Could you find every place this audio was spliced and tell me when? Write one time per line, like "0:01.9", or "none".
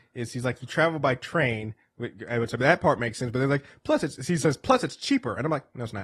none